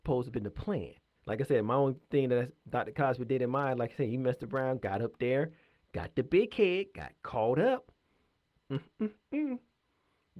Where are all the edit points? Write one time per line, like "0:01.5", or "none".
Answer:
0:01.2